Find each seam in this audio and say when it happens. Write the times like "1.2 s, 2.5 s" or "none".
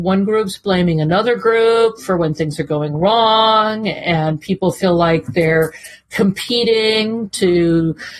none